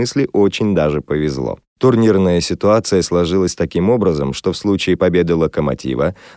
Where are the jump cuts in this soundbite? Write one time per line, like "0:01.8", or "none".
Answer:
none